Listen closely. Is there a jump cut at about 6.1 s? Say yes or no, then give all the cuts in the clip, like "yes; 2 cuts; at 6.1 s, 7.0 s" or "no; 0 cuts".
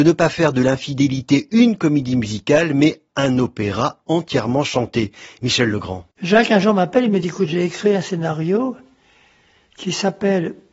yes; 1 cut; at 6.1 s